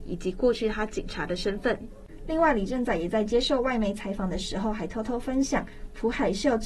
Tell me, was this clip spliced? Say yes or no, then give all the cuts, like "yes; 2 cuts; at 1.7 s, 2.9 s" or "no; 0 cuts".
no; 0 cuts